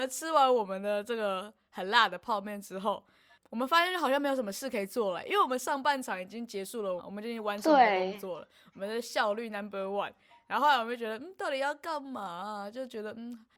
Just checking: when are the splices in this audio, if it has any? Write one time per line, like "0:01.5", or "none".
0:07.0